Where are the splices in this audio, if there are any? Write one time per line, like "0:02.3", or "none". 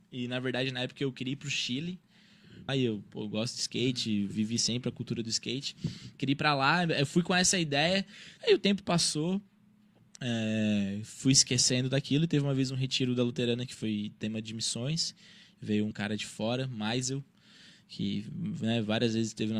0:02.7
0:08.4
0:15.9